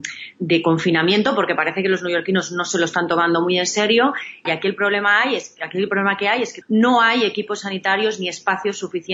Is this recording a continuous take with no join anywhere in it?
no; 2 cuts; at 4.5 s, 6.6 s

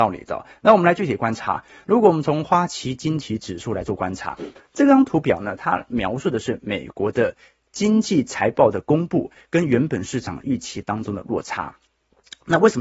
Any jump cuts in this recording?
no; 0 cuts

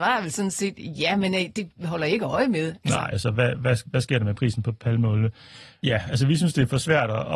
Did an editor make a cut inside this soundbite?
yes; 2 cuts; at 3.1 s, 5.8 s

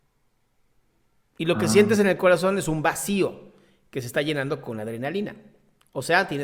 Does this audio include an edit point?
no; 0 cuts

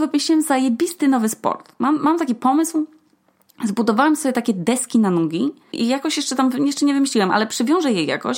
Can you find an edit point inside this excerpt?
yes; 1 cut; at 5.7 s

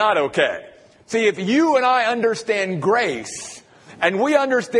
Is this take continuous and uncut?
yes; 0 cuts

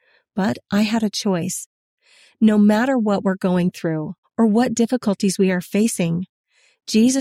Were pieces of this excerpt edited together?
yes; 1 cut; at 4.2 s

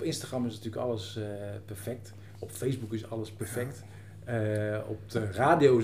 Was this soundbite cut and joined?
no; 0 cuts

